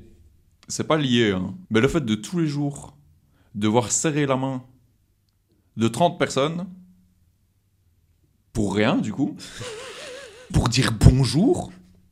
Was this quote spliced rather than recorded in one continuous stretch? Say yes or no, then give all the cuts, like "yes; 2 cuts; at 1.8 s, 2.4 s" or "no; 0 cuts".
yes; 2 cuts; at 1.6 s, 10.5 s